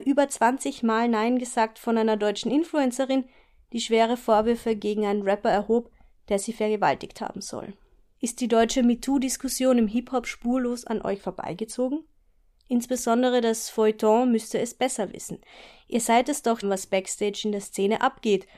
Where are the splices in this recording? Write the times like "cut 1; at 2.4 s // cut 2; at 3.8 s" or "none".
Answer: cut 1; at 8.1 s // cut 2; at 12.6 s // cut 3; at 16.6 s